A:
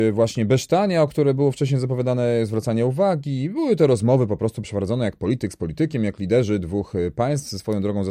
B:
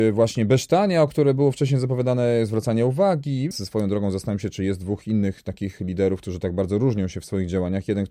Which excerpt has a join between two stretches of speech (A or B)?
B